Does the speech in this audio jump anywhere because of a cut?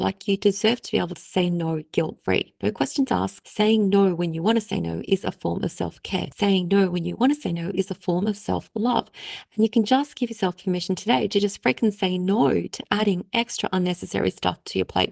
no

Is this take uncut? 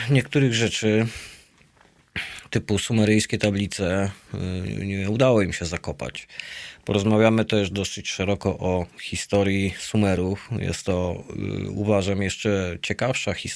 yes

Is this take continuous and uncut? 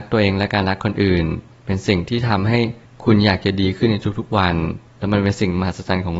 yes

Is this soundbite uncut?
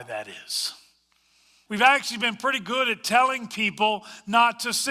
no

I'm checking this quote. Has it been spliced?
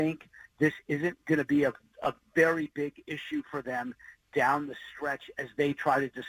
no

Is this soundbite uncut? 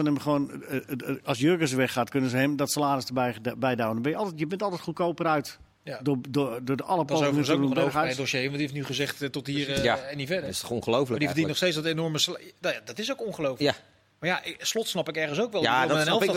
yes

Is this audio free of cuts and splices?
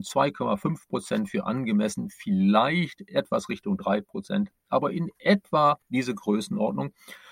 yes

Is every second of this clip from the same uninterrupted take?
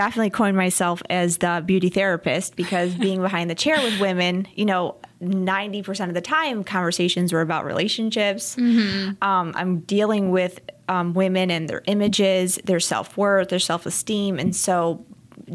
yes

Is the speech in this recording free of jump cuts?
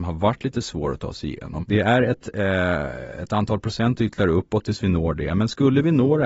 no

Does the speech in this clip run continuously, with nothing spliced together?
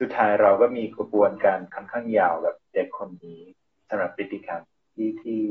yes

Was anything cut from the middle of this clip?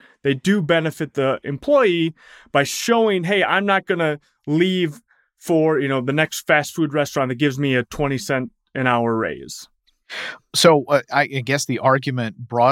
no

